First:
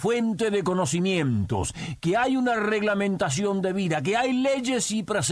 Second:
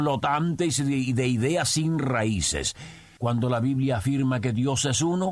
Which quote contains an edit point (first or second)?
second